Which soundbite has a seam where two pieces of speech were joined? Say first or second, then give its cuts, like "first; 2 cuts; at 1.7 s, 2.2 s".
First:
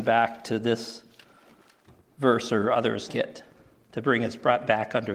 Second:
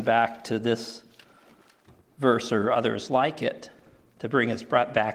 first; 1 cut; at 3.1 s